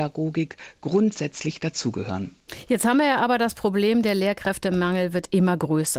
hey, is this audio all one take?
yes; 0 cuts

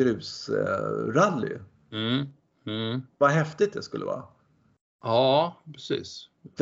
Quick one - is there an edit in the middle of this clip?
no; 0 cuts

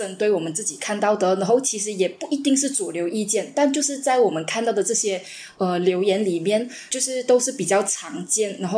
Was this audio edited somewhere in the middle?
no; 0 cuts

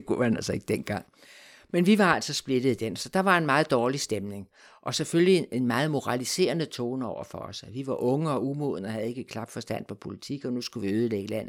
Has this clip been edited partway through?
no; 0 cuts

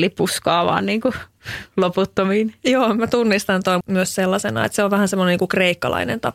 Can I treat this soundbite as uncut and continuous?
no; 1 cut; at 3.8 s

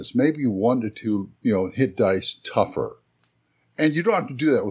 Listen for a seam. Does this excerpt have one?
yes; 1 cut; at 1.4 s

